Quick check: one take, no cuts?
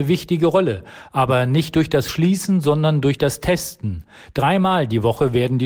yes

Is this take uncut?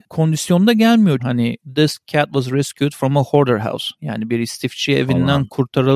no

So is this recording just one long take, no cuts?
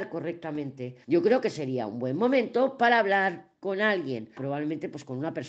no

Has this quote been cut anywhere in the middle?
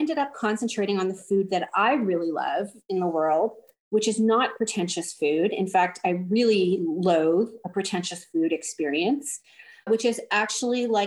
no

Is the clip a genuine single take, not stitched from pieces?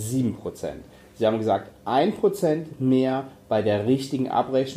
yes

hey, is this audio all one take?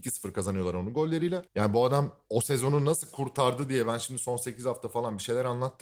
no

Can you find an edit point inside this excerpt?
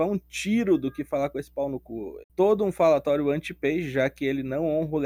yes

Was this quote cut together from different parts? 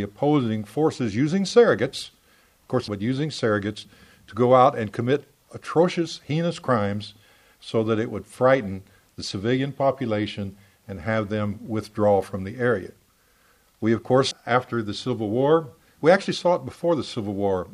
yes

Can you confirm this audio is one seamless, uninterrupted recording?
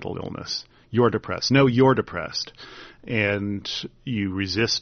yes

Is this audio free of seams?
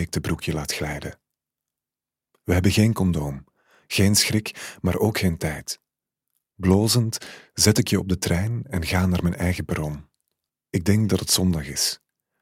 no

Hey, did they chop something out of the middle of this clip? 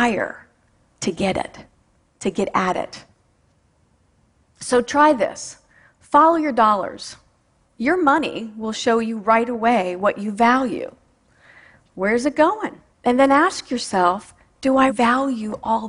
yes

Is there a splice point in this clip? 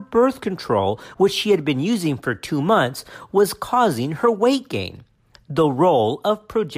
no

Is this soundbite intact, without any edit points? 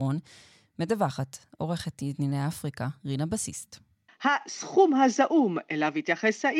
no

